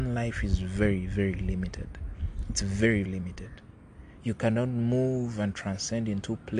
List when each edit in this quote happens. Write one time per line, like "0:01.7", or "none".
0:03.1